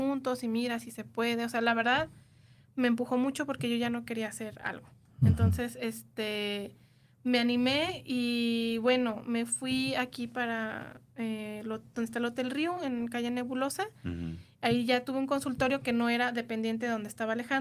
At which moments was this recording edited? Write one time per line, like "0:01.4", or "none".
none